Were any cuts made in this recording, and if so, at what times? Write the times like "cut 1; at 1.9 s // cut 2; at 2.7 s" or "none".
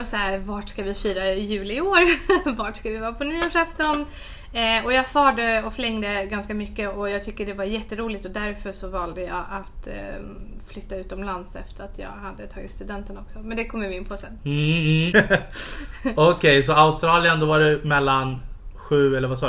cut 1; at 15.1 s